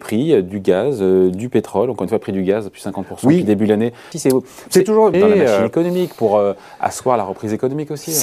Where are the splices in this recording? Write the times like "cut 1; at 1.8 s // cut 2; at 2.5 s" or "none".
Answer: cut 1; at 4.1 s // cut 2; at 5.1 s

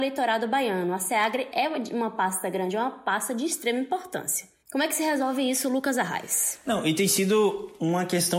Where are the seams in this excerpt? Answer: none

